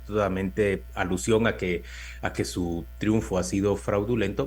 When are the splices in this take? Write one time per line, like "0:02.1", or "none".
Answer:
none